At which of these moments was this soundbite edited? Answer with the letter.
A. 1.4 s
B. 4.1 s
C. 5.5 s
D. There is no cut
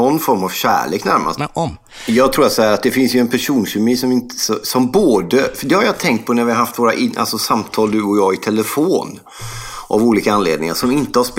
A